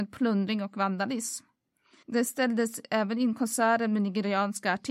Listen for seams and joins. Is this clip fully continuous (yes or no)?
yes